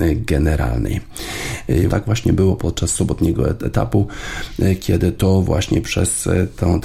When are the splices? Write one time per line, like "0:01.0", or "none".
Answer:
0:01.9